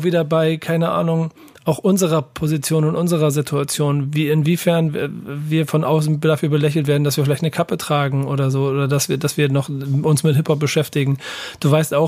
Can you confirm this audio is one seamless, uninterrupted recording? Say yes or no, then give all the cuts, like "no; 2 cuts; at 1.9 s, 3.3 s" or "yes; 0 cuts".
yes; 0 cuts